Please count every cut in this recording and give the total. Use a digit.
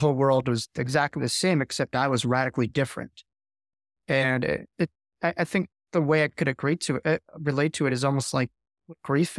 1